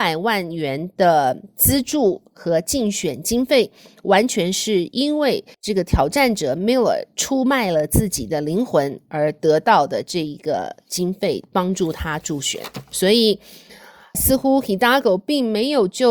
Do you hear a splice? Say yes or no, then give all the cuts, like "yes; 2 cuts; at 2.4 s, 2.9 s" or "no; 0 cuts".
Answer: yes; 1 cut; at 5.5 s